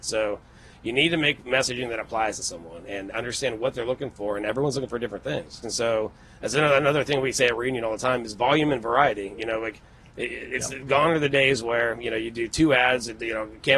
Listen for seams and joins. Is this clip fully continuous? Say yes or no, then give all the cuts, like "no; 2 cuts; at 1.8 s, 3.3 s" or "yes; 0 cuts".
no; 1 cut; at 5.6 s